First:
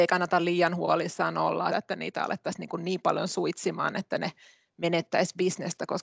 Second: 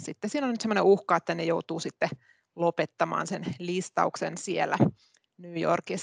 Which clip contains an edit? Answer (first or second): first